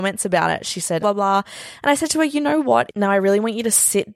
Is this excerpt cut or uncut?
cut